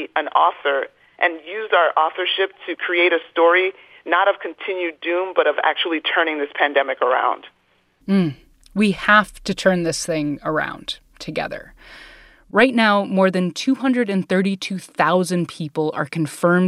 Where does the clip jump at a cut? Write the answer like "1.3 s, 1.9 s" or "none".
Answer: none